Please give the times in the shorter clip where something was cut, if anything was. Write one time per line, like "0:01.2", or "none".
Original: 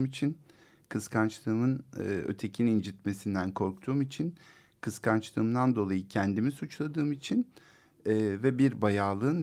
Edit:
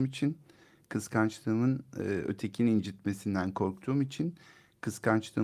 none